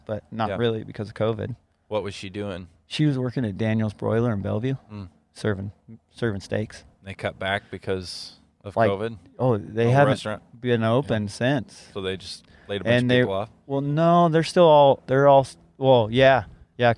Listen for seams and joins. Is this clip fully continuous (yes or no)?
yes